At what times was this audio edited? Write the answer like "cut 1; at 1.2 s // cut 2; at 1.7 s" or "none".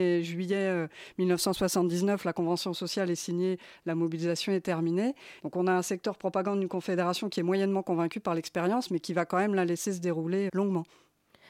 cut 1; at 5.4 s // cut 2; at 10.5 s

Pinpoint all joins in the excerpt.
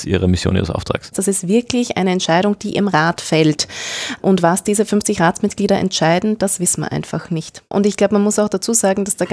cut 1; at 1.1 s // cut 2; at 7.7 s

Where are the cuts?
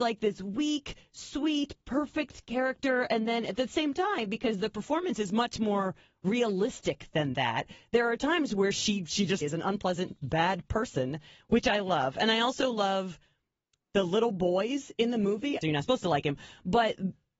cut 1; at 9.4 s // cut 2; at 15.6 s

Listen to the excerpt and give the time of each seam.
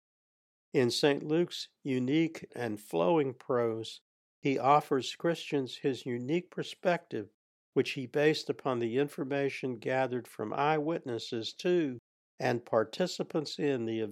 cut 1; at 2.5 s

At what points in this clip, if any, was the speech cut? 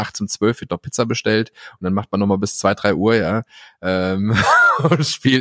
none

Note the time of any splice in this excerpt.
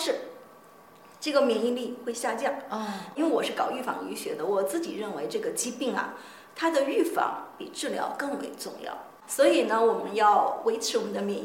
cut 1; at 9.2 s

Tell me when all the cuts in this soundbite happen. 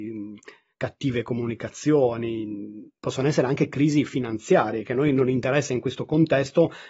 none

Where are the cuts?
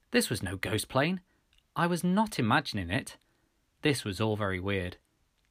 cut 1; at 3.7 s

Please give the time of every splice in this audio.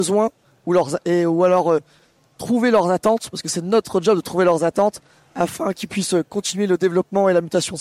none

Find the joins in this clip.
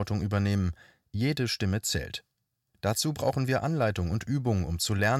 none

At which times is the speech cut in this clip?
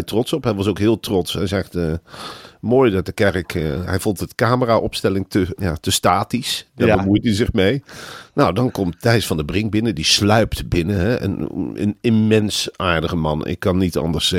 cut 1; at 5.6 s

